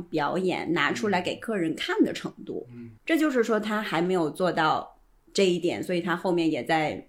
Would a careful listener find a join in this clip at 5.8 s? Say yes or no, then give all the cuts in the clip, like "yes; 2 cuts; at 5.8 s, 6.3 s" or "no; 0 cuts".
no; 1 cut; at 3.0 s